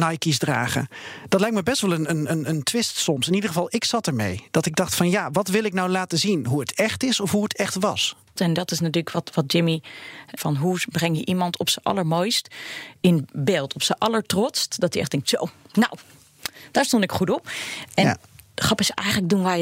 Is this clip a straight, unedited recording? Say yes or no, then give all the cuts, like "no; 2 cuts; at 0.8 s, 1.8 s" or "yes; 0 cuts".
no; 2 cuts; at 8.4 s, 10.4 s